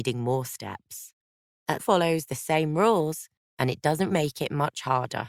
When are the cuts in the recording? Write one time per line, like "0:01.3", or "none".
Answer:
0:01.8
0:04.1